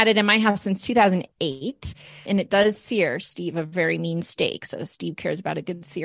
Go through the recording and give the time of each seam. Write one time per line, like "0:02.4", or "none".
0:02.3

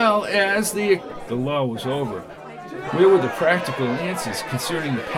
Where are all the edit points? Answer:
0:02.9

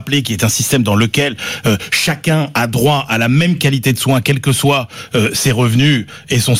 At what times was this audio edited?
none

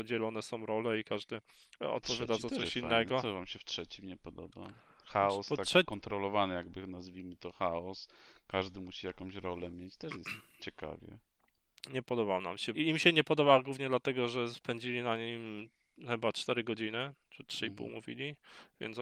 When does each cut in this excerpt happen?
0:12.7

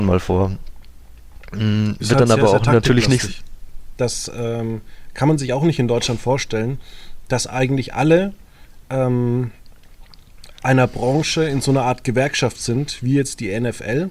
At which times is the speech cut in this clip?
0:04.0

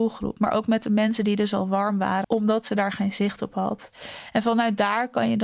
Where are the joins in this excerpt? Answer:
0:02.2

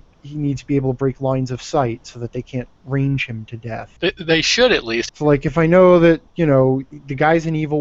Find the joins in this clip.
0:04.0
0:05.1

